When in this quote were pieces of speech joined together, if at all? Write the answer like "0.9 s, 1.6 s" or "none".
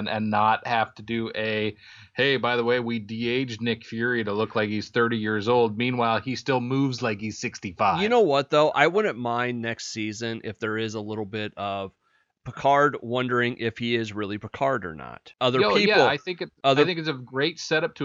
none